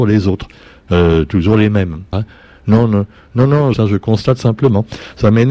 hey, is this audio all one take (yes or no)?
no